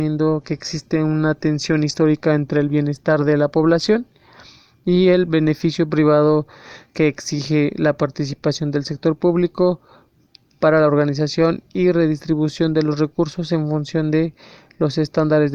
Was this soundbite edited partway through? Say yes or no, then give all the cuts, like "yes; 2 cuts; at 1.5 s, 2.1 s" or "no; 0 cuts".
no; 0 cuts